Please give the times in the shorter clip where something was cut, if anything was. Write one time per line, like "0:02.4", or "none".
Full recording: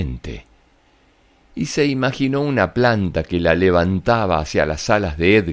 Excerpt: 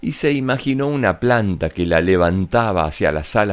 none